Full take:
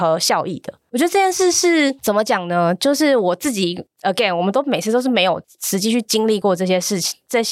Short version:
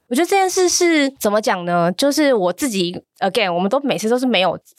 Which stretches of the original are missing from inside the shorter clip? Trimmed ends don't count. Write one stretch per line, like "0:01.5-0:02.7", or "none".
none